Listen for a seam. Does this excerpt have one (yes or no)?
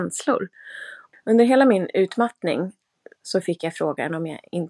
yes